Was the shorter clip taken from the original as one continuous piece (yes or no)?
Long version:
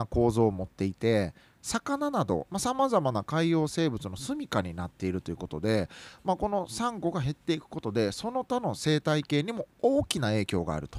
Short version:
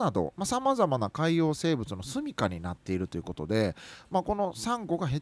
yes